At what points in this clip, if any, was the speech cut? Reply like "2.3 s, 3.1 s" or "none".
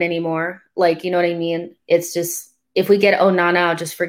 none

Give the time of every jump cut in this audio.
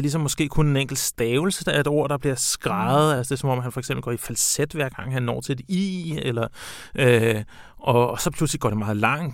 none

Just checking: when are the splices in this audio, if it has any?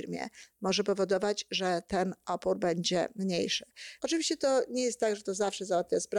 4.0 s

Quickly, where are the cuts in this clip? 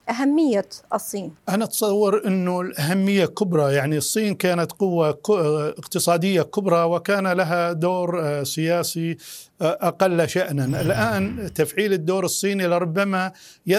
1.4 s

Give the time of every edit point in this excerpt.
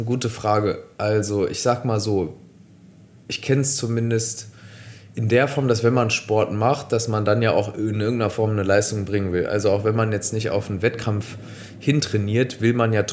none

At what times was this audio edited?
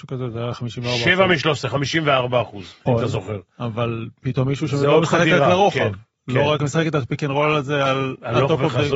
2.9 s

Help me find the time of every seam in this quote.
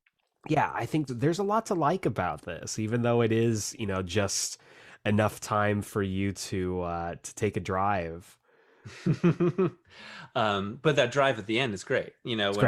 1.1 s

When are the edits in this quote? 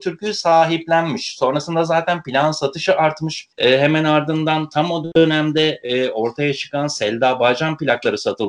3.5 s

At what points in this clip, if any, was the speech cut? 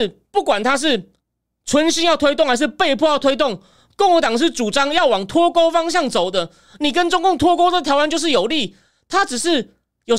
none

